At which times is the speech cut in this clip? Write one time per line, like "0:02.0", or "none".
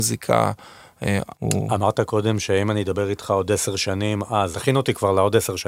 0:01.3
0:04.5